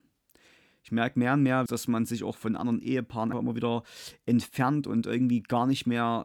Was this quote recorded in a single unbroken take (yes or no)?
no